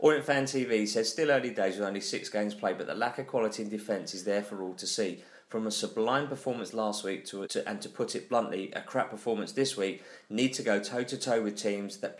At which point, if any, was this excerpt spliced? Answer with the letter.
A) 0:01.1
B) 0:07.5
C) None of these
B